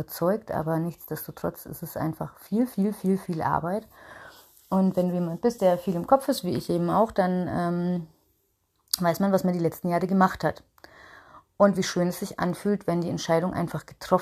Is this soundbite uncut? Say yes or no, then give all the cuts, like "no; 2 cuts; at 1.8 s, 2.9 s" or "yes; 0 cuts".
yes; 0 cuts